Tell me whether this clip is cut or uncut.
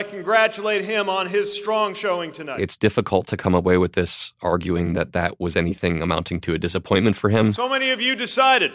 uncut